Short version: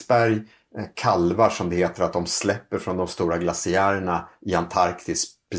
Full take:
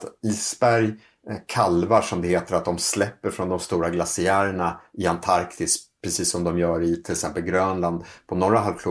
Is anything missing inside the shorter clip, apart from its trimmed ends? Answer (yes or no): no